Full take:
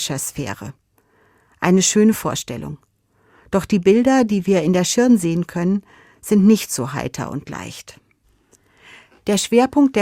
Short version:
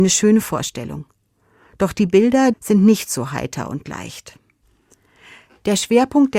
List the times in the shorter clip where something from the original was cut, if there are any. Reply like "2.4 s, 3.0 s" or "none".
2.5 s